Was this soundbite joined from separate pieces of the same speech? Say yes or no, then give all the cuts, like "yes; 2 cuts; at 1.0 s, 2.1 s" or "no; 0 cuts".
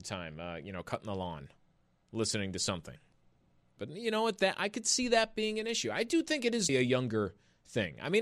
yes; 2 cuts; at 3.8 s, 6.7 s